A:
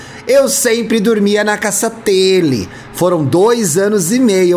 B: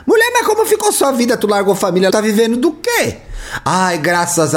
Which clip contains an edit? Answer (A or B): B